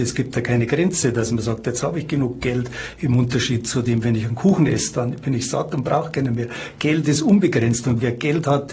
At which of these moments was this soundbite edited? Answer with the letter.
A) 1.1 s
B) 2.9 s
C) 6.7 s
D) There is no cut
D